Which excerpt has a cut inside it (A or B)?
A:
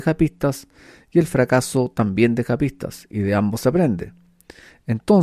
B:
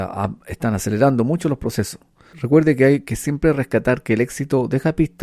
B